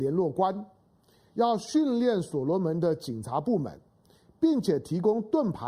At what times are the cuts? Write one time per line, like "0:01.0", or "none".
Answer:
none